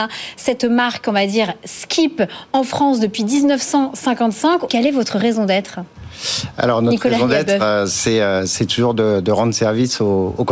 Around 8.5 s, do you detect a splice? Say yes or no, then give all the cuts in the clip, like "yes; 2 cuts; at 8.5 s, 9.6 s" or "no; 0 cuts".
no; 1 cut; at 4.7 s